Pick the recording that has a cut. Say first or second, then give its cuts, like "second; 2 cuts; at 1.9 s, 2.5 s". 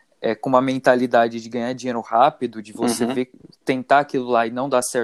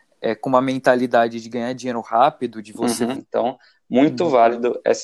second; 1 cut; at 3.2 s